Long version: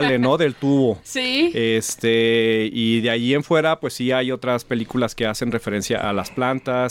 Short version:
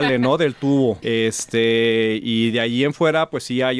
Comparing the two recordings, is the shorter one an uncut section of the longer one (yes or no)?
no